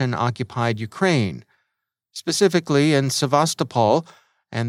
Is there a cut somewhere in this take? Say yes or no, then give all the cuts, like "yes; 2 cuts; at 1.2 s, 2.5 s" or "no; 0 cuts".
no; 0 cuts